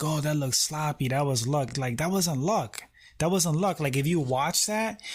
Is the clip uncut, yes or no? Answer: yes